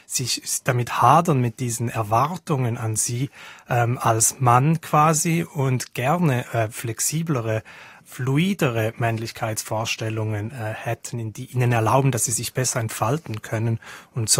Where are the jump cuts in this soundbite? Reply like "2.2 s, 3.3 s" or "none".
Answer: none